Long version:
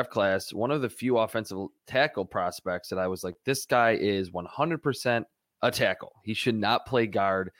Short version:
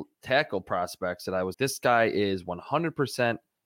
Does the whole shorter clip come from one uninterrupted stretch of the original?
no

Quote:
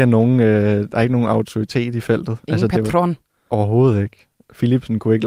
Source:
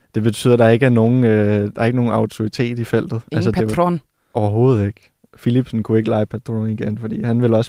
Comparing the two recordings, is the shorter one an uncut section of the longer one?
yes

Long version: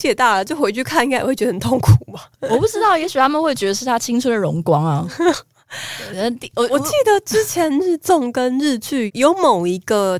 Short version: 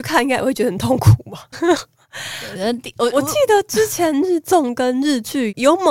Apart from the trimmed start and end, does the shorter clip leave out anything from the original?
yes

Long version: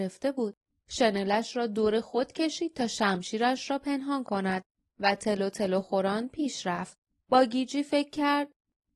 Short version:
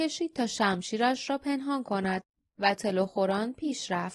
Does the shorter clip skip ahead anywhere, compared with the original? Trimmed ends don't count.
yes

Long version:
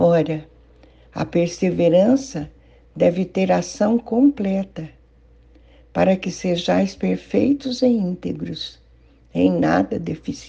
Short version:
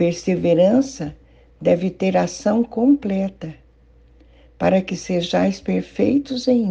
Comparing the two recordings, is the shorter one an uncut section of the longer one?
yes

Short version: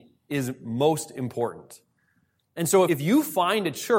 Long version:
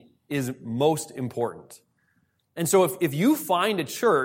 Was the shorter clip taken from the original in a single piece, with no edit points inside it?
no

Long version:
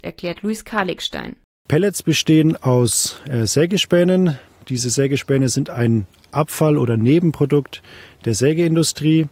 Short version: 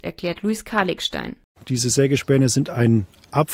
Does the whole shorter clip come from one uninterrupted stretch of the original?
no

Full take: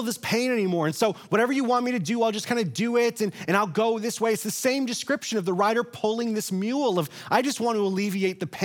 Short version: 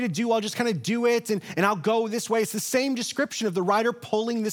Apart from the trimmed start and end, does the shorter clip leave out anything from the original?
no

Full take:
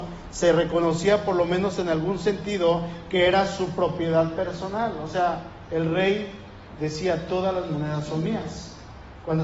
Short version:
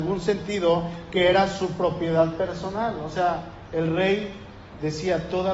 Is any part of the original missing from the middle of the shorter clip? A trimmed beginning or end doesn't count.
no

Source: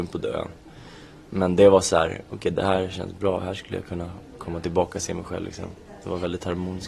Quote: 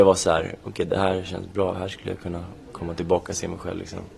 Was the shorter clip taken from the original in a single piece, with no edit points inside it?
yes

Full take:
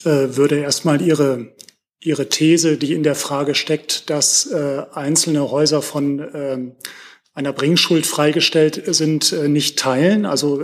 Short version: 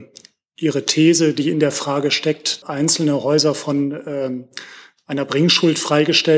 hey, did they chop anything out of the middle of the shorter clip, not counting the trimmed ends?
yes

